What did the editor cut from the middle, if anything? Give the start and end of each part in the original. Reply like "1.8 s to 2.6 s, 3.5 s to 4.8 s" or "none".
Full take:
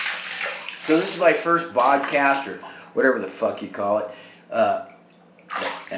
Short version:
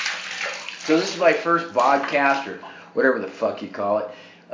none